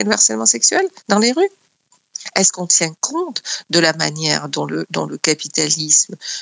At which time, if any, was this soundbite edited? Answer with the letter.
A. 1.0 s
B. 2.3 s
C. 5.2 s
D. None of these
A